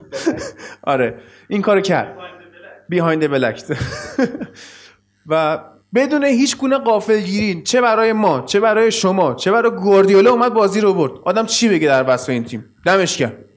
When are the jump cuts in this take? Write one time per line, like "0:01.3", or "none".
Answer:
none